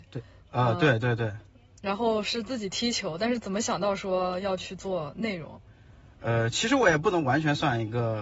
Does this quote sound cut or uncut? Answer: uncut